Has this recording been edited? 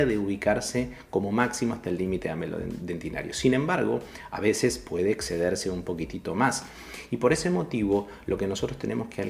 no; 0 cuts

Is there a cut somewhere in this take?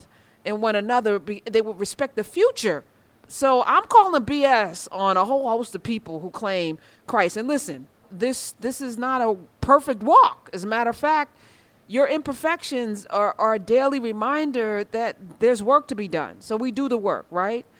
no; 0 cuts

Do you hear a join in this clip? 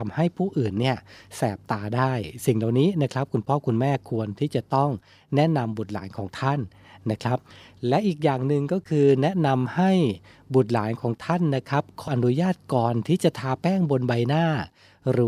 yes; 1 cut; at 12.1 s

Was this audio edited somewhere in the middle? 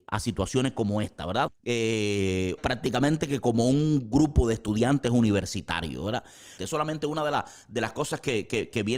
yes; 3 cuts; at 1.5 s, 2.6 s, 6.6 s

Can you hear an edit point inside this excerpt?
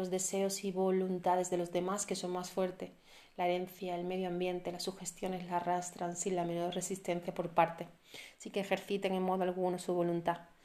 no; 0 cuts

